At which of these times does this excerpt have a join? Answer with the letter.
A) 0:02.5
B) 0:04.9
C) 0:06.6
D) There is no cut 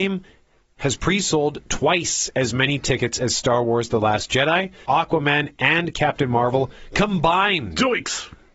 B